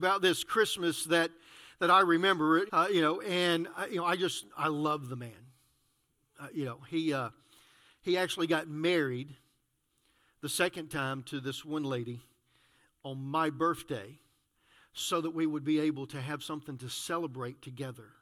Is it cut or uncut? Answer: cut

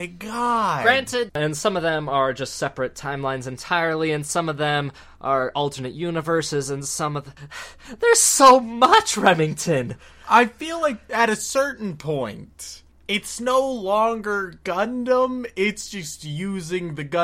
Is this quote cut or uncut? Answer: cut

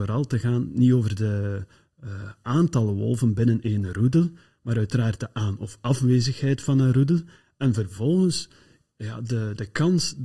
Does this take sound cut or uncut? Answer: uncut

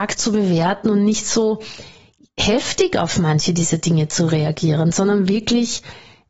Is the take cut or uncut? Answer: uncut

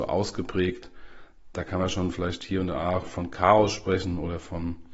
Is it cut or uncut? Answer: uncut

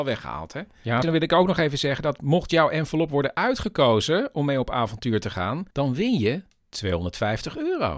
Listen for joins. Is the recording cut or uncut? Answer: cut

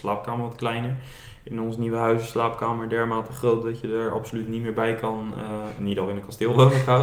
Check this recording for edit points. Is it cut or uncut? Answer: uncut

